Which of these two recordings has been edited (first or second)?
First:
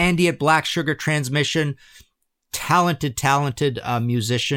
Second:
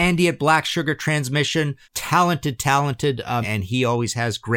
second